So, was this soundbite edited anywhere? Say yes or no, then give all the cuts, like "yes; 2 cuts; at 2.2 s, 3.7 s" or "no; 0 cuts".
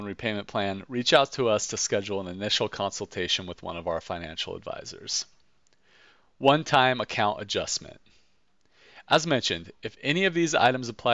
no; 0 cuts